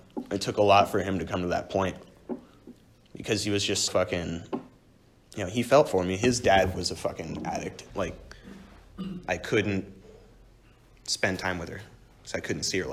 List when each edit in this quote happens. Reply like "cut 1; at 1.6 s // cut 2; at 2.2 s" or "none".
cut 1; at 3.9 s // cut 2; at 7.9 s